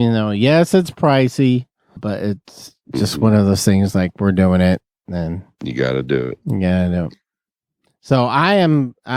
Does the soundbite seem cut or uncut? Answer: cut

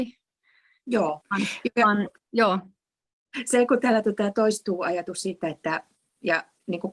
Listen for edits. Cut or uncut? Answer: cut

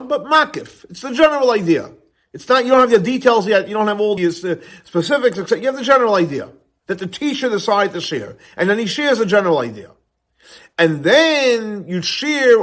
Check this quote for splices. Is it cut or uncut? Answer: cut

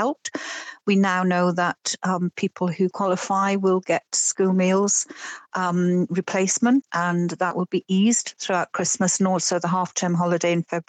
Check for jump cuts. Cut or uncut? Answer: cut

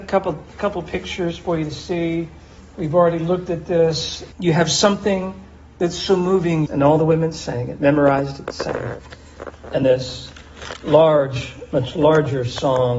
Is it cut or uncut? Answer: cut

